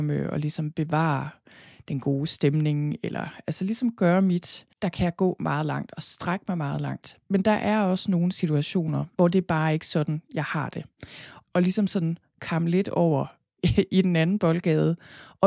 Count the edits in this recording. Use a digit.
2